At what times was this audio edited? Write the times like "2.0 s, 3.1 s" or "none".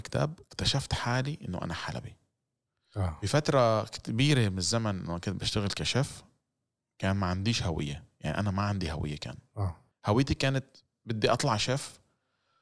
none